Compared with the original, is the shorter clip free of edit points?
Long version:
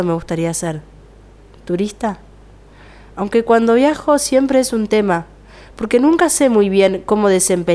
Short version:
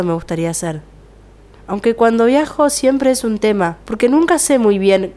no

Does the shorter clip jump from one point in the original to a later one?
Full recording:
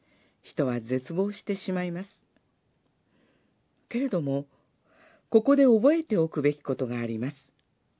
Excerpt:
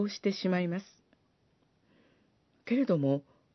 no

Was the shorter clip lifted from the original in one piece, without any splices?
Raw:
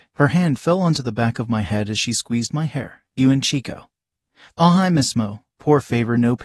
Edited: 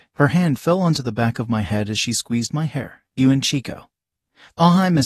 yes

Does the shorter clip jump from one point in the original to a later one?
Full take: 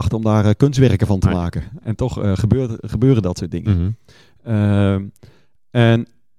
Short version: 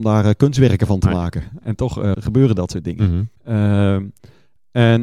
yes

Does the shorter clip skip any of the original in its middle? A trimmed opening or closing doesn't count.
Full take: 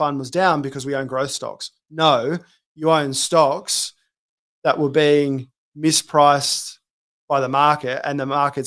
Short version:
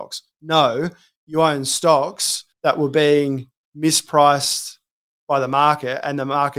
yes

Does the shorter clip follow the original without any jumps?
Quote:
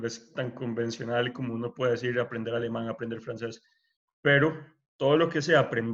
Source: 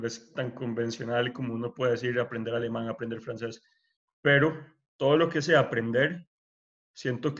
yes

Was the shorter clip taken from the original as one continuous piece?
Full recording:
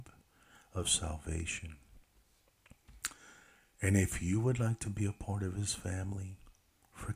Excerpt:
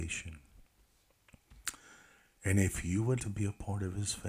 no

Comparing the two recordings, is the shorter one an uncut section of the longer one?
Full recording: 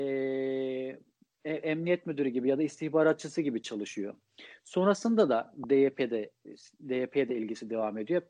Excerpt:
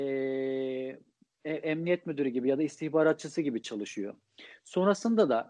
yes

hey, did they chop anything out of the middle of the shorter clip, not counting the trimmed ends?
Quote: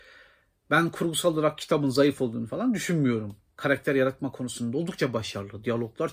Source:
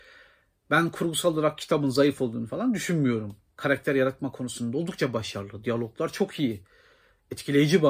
no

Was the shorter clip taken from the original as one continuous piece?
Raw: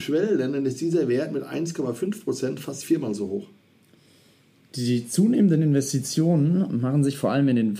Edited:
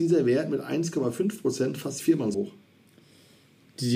no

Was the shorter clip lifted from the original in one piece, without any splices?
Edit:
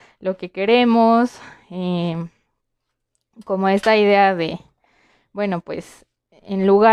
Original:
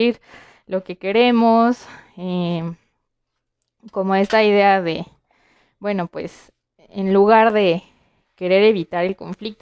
yes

